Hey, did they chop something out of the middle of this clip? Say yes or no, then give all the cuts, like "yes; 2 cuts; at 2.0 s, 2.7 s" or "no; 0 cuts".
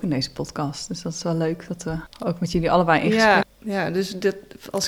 yes; 1 cut; at 3.4 s